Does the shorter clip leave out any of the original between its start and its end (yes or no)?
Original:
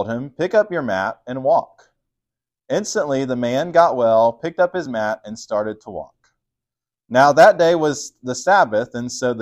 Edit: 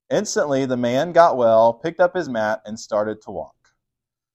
no